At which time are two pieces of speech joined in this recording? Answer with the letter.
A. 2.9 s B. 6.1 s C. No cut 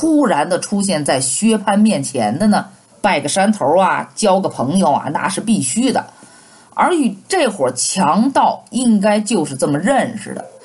A